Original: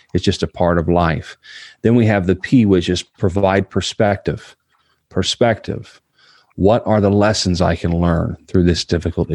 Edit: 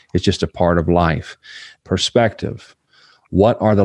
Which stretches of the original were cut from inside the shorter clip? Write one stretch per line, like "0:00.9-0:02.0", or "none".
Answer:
0:01.7-0:05.0